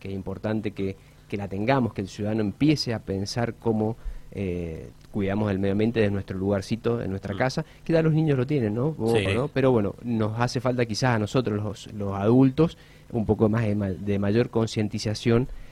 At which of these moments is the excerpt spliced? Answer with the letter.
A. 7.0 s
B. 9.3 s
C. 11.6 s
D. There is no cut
B